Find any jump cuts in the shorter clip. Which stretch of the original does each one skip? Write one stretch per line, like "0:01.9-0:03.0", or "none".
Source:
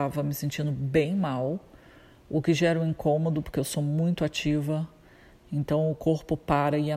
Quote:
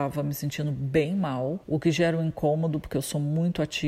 0:01.6-0:02.2